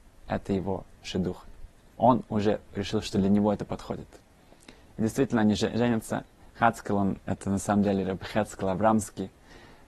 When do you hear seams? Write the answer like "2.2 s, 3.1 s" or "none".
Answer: none